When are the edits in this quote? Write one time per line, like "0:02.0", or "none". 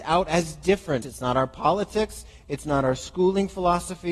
0:01.0